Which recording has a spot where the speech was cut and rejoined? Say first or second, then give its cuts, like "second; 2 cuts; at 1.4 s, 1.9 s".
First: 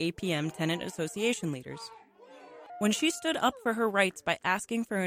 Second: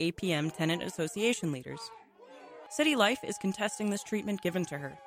first; 1 cut; at 2.7 s